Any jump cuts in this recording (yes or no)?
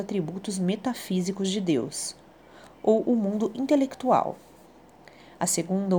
no